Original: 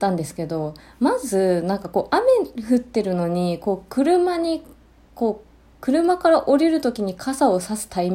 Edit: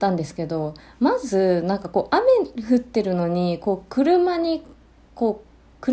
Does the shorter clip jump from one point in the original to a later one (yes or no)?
no